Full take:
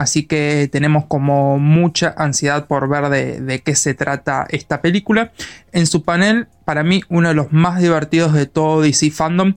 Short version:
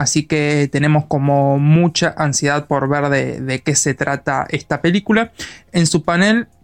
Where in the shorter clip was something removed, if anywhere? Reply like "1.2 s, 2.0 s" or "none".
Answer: none